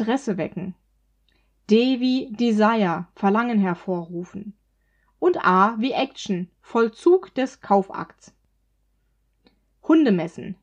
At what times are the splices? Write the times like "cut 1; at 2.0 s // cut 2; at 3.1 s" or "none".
none